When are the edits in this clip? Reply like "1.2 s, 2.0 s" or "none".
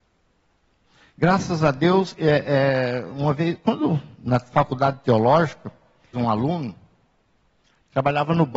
6.1 s